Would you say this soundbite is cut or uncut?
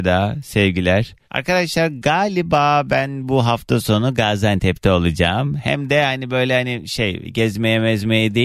cut